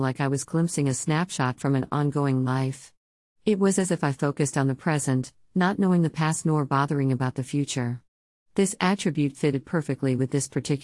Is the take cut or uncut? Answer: uncut